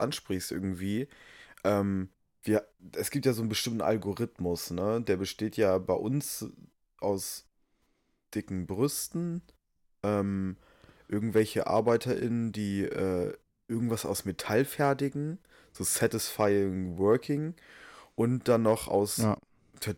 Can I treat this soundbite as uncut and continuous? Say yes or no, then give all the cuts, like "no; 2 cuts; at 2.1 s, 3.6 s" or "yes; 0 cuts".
yes; 0 cuts